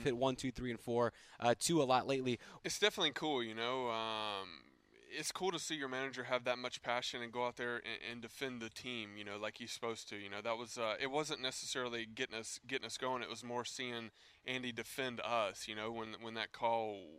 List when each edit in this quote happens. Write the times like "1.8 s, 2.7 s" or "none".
2.6 s